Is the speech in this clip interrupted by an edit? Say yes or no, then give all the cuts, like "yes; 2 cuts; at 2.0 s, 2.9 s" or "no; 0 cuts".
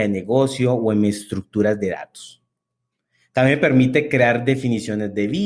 no; 0 cuts